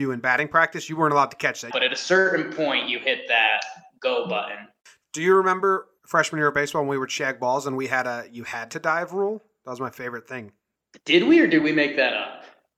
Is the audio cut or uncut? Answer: cut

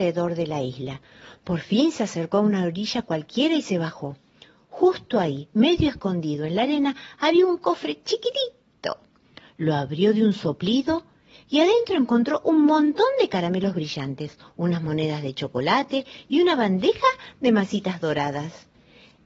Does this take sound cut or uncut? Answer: uncut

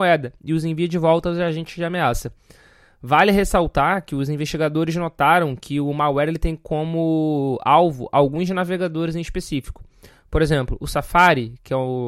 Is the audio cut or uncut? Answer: uncut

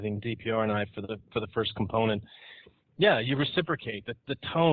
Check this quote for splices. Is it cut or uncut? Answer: cut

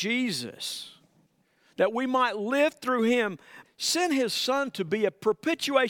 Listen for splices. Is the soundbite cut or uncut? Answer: cut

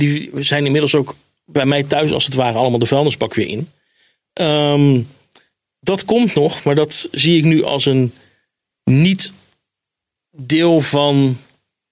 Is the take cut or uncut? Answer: uncut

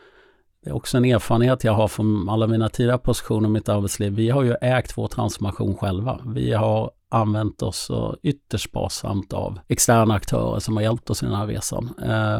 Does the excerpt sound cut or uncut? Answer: cut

